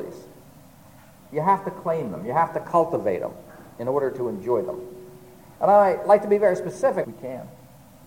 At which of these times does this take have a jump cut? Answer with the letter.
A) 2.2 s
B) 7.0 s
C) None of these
B